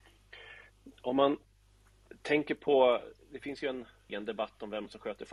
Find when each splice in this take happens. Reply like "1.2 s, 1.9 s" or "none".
4.1 s